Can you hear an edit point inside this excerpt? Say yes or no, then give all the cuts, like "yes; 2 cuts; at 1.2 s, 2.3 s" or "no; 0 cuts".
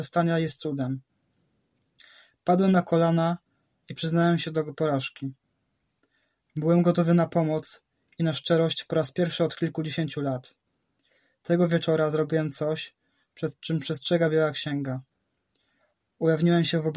no; 0 cuts